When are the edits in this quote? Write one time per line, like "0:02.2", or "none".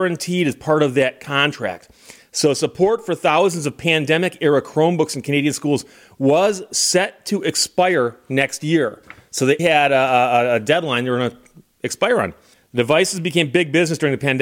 0:09.6
0:12.5